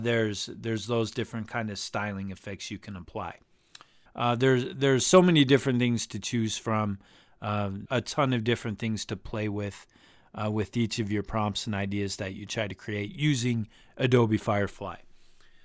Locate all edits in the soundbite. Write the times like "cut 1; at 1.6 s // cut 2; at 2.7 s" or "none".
cut 1; at 4.1 s // cut 2; at 7.9 s

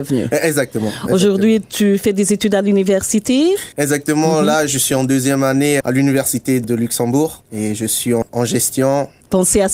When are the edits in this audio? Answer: none

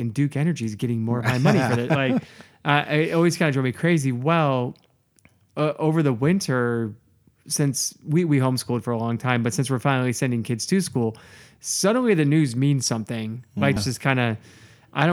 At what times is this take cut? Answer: cut 1; at 13.8 s

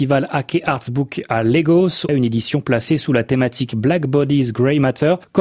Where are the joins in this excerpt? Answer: cut 1; at 2.1 s

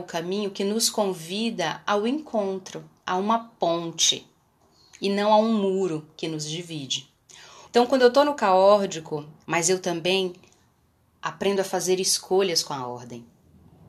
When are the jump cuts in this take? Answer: cut 1; at 7.7 s // cut 2; at 9.4 s

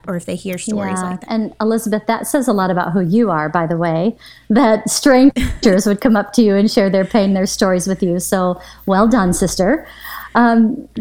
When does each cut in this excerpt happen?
cut 1; at 1.3 s

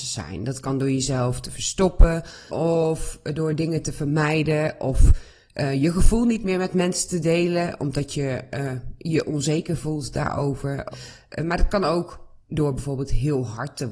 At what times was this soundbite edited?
cut 1; at 2.5 s // cut 2; at 10.9 s

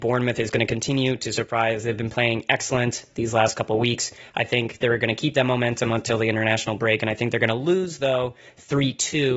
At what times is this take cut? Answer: none

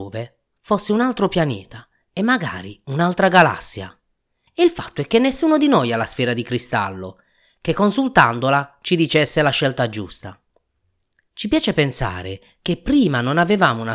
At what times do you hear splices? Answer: none

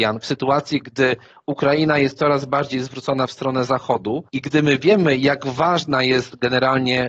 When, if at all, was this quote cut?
cut 1; at 4.3 s

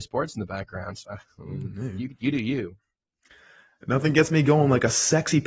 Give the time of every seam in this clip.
none

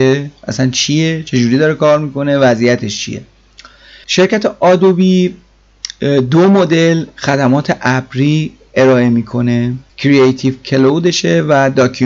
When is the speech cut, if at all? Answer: cut 1; at 9.9 s

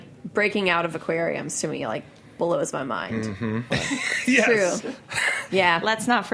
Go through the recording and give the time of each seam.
cut 1; at 3.7 s // cut 2; at 4.8 s

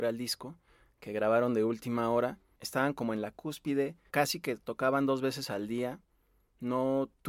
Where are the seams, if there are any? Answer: cut 1; at 4.1 s

